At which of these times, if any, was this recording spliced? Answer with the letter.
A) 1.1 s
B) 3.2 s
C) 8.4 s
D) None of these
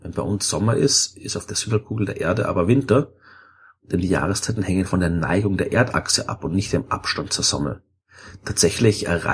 D